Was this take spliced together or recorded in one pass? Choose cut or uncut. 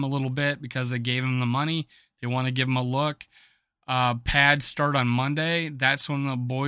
uncut